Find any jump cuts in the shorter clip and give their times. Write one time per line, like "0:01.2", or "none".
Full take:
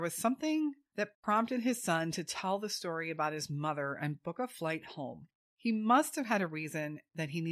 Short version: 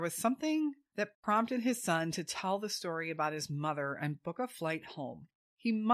none

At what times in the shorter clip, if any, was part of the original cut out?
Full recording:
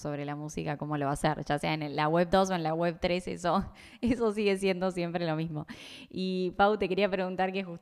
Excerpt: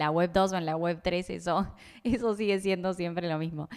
none

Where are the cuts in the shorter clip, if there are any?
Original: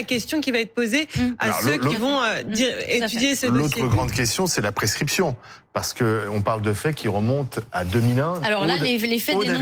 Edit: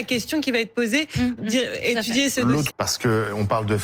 0:01.4
0:02.7

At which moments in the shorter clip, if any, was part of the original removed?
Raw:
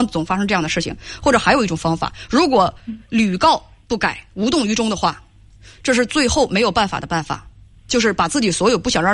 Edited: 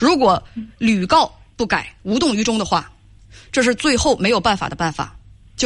none

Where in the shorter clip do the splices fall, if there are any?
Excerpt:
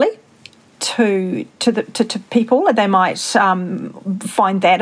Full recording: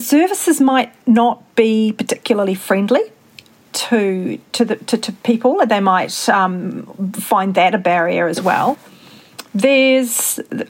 none

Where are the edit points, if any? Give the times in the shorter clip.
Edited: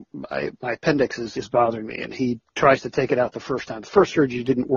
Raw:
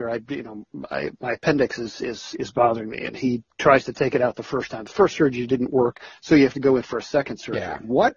0:01.3

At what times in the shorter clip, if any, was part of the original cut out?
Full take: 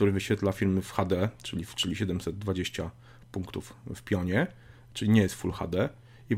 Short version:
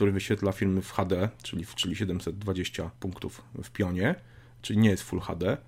0:03.0

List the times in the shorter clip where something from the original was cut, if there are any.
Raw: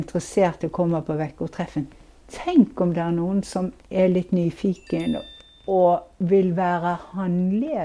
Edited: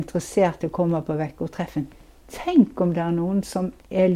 none

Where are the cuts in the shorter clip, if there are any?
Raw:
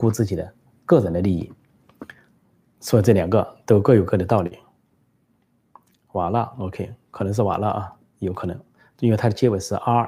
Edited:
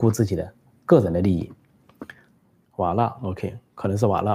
0:02.7

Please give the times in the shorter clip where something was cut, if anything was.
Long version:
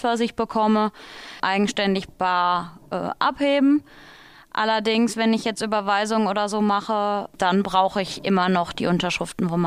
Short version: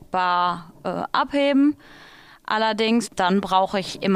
0:03.1

